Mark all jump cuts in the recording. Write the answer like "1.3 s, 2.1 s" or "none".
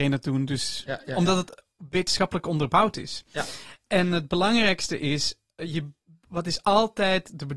none